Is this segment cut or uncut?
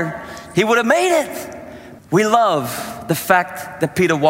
cut